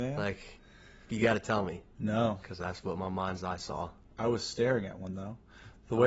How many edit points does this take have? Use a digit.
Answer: 1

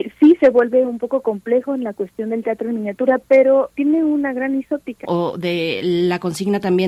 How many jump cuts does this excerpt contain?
2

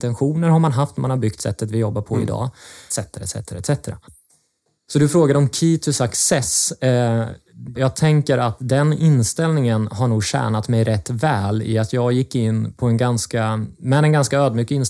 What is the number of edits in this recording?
2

